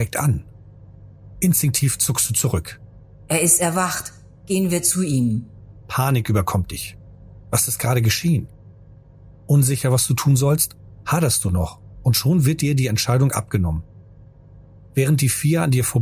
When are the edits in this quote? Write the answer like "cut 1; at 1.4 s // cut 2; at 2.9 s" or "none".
none